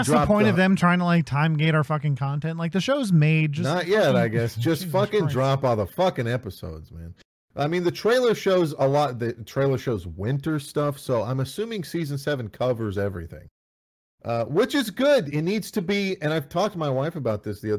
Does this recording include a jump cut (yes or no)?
no